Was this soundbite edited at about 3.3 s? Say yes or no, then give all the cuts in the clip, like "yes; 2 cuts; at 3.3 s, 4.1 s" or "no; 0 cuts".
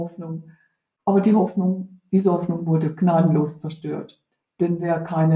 no; 1 cut; at 1.0 s